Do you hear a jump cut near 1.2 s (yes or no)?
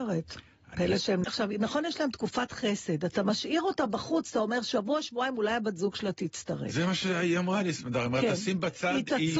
yes